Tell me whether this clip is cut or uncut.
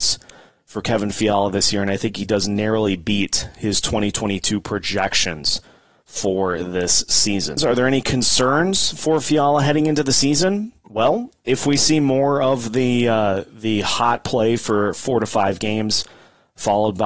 cut